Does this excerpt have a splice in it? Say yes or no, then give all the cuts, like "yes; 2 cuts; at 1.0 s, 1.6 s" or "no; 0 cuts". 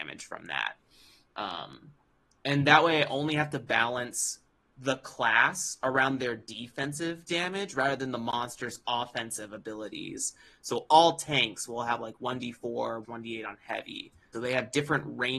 yes; 2 cuts; at 13.0 s, 14.3 s